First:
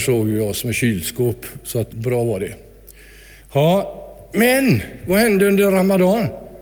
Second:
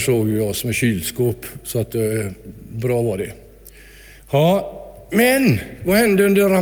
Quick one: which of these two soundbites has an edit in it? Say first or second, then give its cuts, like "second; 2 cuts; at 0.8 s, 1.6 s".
first; 1 cut; at 1.9 s